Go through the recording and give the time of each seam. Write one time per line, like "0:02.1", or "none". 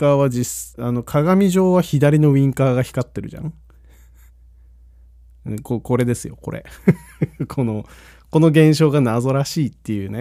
none